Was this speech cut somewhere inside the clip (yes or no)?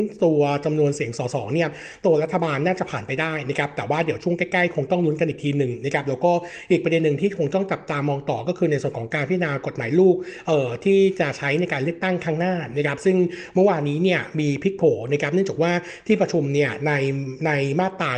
no